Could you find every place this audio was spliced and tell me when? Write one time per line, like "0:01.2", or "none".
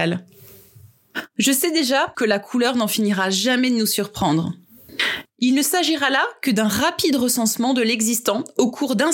0:02.1
0:05.3